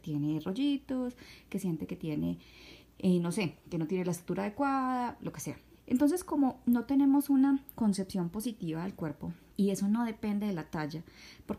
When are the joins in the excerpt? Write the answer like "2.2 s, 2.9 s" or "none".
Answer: 5.7 s, 9.5 s

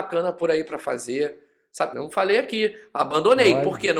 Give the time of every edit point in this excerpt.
1.9 s

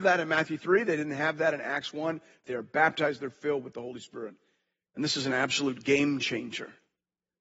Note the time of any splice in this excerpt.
2.4 s

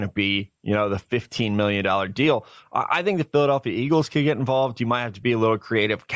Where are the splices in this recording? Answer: none

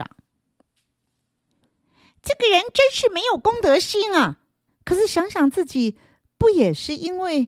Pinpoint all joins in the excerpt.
4.7 s

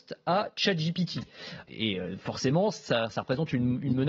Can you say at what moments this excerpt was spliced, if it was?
1.6 s

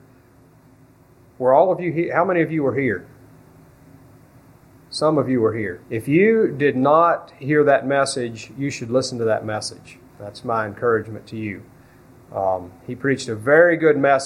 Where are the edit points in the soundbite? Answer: 5.8 s

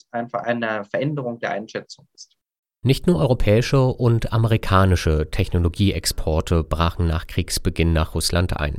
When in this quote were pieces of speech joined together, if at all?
none

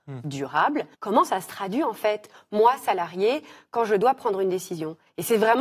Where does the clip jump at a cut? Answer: 0.9 s

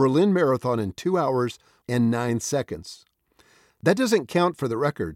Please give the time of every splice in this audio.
1.8 s, 3.7 s

